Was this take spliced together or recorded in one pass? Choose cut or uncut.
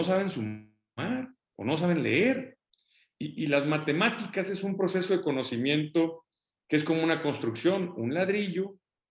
uncut